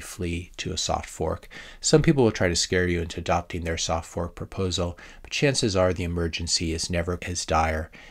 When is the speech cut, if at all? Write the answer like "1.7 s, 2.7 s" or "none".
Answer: 7.2 s